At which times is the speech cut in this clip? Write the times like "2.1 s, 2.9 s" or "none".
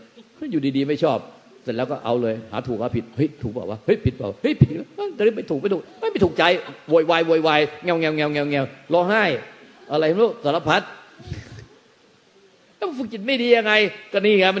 none